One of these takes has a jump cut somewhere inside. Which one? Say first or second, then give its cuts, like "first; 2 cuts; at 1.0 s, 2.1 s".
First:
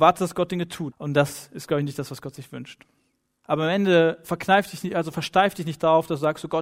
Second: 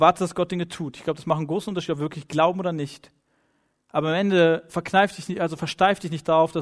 first; 2 cuts; at 0.9 s, 3.4 s